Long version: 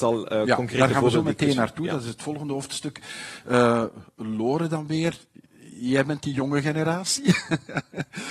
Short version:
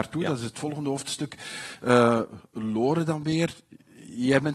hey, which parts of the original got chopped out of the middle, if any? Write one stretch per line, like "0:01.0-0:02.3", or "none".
none